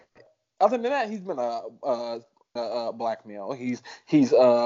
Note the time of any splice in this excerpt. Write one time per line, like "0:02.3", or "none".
0:02.6